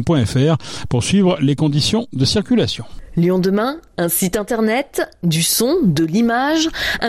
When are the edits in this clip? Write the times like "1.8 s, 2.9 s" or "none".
none